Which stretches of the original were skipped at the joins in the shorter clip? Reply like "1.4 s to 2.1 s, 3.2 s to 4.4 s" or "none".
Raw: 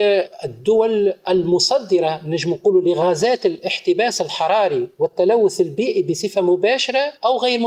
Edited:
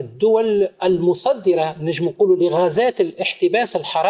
none